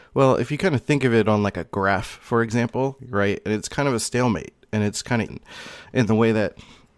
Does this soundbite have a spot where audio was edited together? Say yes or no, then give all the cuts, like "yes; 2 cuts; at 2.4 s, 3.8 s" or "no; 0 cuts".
yes; 2 cuts; at 3.0 s, 5.3 s